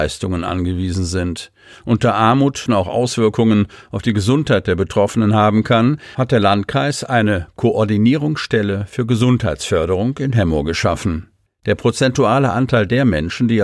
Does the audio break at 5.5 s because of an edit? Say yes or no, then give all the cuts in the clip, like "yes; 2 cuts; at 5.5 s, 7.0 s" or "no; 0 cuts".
no; 2 cuts; at 2.7 s, 11.5 s